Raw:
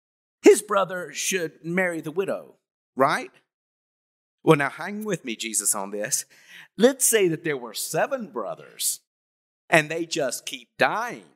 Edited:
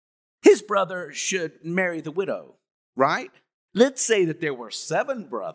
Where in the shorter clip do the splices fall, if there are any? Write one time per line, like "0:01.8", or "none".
0:03.7